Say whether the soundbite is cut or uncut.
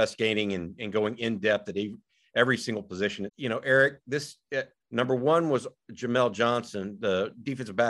cut